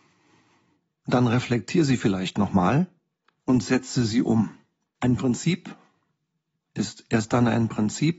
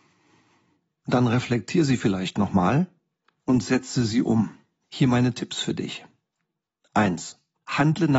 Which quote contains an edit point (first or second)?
second